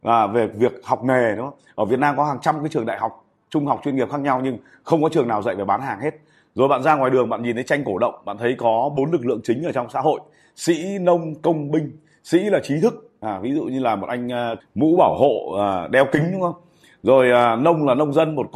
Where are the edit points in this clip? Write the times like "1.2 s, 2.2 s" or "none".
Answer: 14.6 s

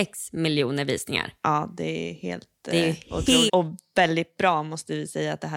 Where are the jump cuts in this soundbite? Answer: 3.5 s

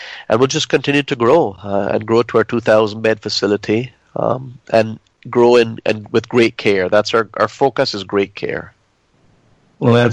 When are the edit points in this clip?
none

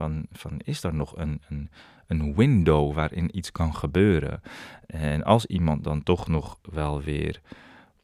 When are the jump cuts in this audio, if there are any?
none

